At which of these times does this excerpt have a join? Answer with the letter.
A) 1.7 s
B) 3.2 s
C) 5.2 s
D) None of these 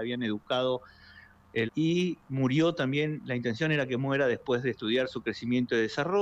A